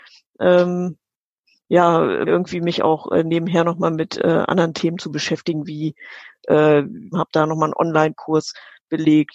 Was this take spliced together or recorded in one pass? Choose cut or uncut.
cut